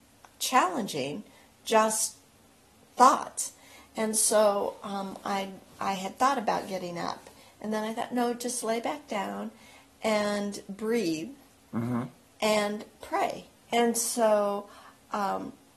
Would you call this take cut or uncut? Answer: cut